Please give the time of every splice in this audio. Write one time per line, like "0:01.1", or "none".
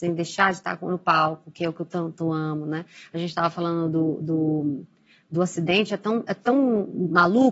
none